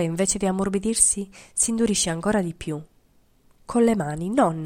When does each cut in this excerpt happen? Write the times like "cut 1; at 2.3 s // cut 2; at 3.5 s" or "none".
none